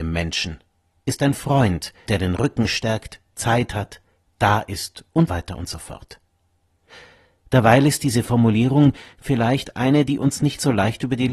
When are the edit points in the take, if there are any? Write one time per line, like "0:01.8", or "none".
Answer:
0:02.1
0:05.3

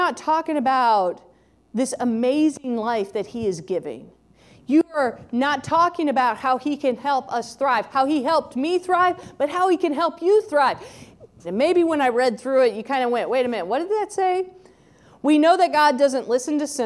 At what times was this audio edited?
0:11.4

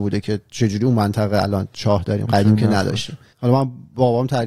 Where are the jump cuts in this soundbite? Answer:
0:03.3

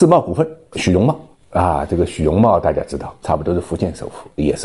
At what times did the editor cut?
none

